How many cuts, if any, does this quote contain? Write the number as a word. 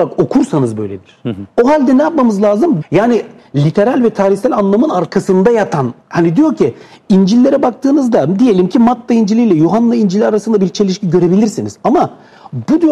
three